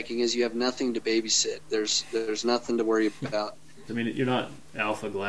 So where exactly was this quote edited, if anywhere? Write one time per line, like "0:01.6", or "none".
0:01.7
0:03.9